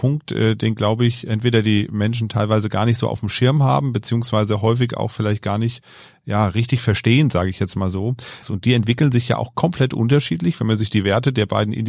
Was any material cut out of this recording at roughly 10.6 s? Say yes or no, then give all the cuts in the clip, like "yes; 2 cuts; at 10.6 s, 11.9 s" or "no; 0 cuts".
no; 1 cut; at 8.4 s